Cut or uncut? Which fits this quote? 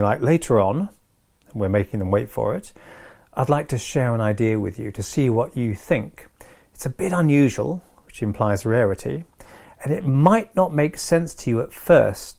uncut